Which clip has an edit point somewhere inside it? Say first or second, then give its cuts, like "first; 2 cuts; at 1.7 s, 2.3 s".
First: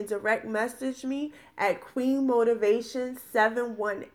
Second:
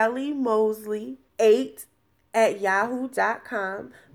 second; 1 cut; at 1.3 s